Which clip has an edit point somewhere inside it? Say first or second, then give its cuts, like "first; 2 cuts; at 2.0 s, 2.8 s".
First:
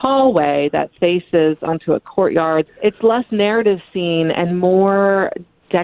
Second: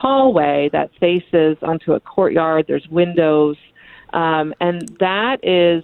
first; 1 cut; at 2.7 s